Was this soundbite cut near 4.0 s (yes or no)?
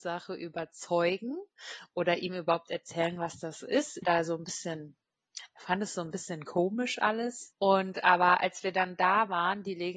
yes